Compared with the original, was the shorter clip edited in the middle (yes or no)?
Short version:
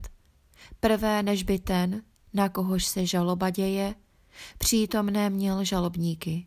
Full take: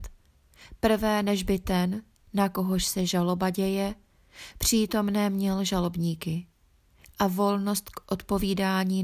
no